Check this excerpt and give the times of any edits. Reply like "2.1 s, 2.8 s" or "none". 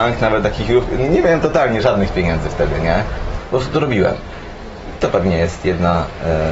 3.4 s